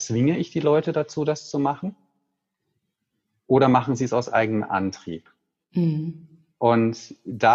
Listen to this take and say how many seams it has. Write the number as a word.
zero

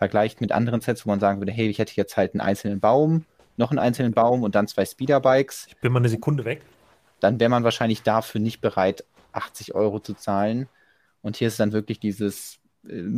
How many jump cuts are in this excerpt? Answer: zero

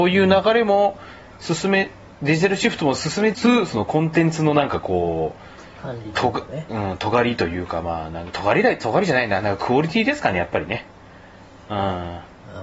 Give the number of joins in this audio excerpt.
one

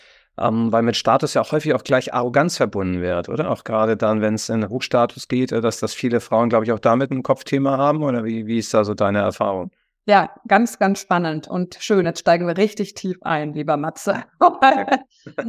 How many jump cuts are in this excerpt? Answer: zero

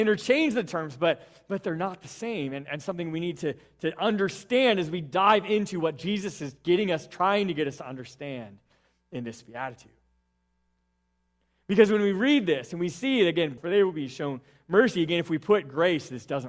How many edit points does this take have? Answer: one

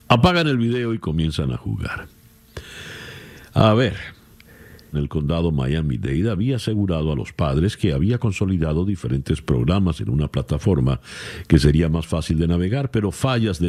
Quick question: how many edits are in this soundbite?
one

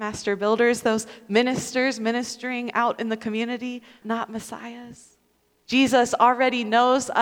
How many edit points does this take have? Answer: two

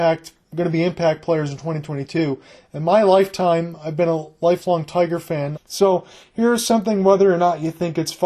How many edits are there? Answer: one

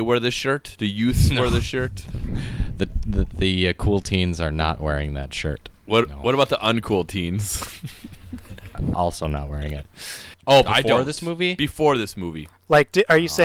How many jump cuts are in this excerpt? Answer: two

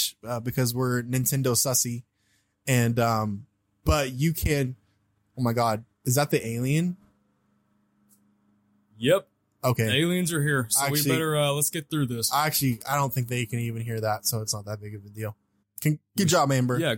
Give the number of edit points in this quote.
two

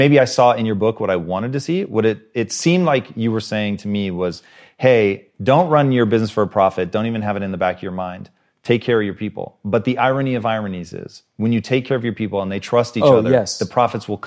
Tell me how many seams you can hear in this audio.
zero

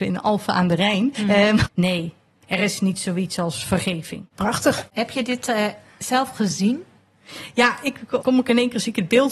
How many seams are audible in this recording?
two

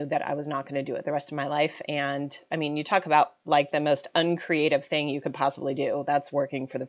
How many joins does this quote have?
zero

